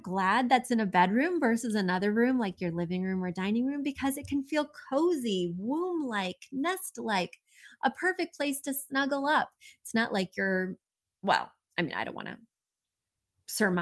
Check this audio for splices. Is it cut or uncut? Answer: uncut